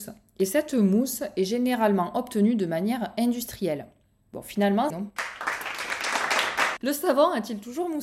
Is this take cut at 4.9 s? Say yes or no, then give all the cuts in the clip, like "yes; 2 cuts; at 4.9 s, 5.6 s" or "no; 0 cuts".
yes; 1 cut; at 4.9 s